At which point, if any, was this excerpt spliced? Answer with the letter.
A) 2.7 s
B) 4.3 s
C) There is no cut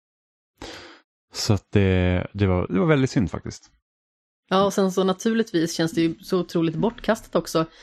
A